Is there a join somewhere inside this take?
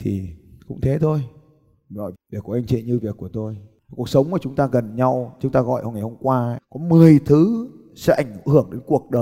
yes; 1 cut; at 2.1 s

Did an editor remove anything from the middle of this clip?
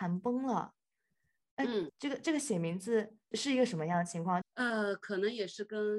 yes; 3 cuts; at 1.9 s, 3.3 s, 4.4 s

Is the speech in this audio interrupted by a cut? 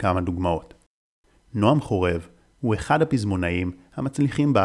no; 0 cuts

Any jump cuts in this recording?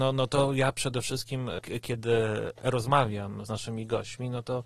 yes; 1 cut; at 3.5 s

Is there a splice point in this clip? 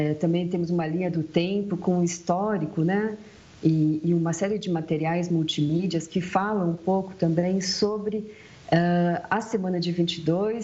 no; 0 cuts

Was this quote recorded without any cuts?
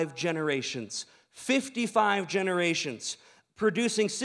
yes; 0 cuts

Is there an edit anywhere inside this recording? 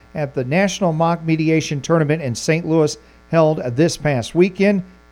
no; 0 cuts

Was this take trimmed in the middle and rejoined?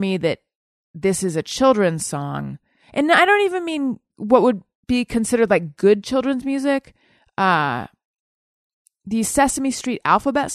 yes; 1 cut; at 4.1 s

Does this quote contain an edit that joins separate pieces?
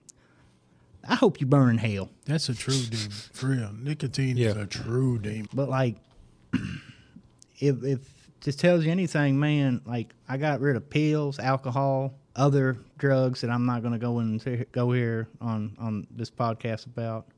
yes; 3 cuts; at 5.5 s, 10.2 s, 12.2 s

